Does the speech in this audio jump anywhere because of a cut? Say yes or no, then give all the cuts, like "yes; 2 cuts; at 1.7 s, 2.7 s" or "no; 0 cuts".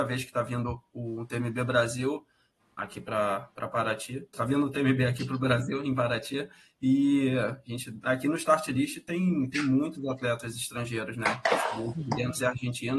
yes; 1 cut; at 4.3 s